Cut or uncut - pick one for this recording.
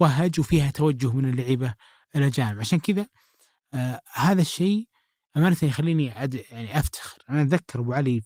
uncut